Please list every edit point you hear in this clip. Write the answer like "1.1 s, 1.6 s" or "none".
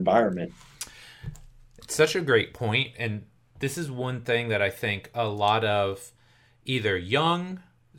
none